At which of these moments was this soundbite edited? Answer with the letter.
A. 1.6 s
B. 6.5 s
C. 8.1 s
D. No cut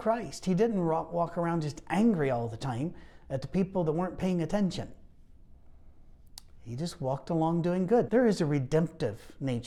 C